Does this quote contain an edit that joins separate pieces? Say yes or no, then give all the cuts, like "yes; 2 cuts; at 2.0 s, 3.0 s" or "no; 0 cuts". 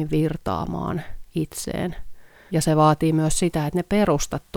yes; 1 cut; at 2.5 s